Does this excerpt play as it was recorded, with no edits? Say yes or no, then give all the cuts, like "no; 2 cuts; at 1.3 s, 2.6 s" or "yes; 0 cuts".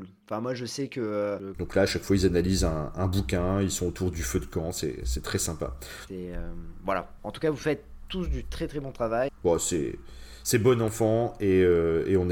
no; 3 cuts; at 1.5 s, 6.1 s, 9.3 s